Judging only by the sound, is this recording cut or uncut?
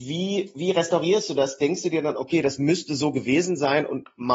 uncut